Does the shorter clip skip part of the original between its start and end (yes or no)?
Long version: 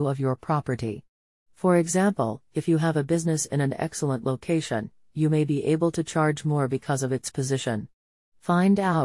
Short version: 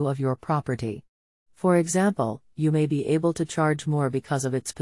yes